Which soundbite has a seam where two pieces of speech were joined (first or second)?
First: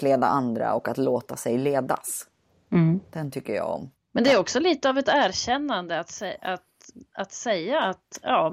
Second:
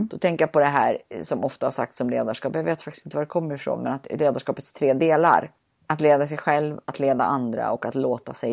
first